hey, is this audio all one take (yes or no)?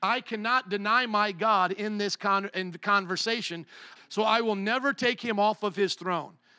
no